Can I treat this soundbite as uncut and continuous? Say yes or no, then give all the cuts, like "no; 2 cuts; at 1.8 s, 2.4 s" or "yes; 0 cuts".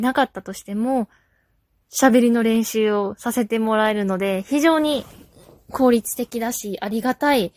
no; 1 cut; at 1.8 s